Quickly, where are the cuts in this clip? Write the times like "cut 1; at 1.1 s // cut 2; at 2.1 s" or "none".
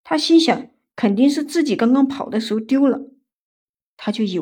none